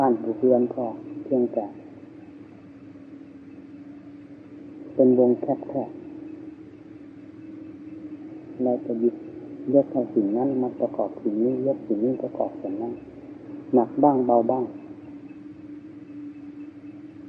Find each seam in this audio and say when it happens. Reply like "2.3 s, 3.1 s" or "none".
12.2 s